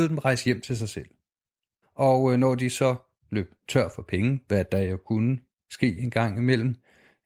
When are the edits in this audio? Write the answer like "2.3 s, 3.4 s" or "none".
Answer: 1.8 s

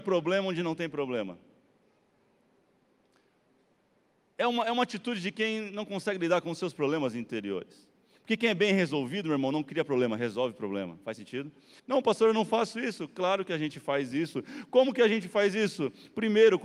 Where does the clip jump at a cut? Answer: 11.8 s

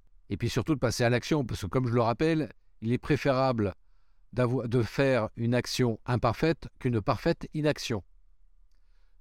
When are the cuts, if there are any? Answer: none

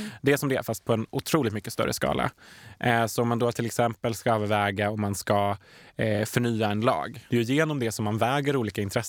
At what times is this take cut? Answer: 7.3 s

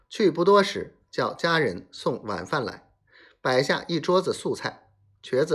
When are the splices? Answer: none

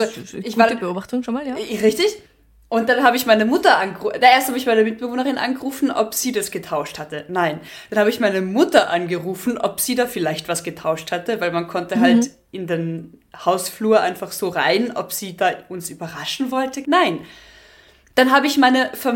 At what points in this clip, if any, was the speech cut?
16.8 s

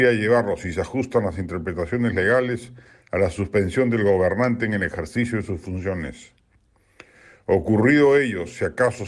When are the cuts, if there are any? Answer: none

